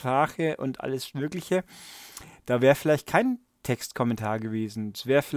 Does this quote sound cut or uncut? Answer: uncut